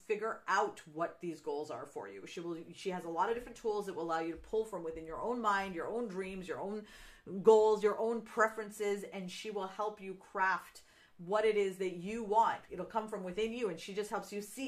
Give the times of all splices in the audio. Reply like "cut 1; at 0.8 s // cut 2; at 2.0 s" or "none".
none